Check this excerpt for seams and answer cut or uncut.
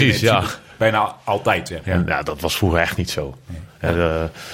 cut